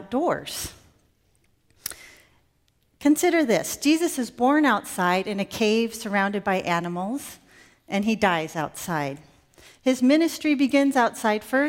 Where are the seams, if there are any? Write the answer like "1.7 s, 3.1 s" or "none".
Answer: none